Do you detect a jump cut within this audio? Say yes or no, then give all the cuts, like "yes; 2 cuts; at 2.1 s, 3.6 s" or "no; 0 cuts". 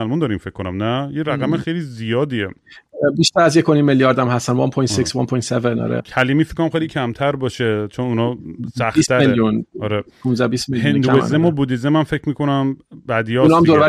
yes; 1 cut; at 6.0 s